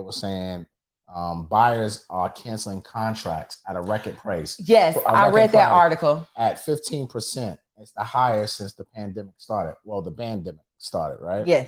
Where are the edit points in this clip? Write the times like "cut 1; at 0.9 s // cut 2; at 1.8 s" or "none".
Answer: none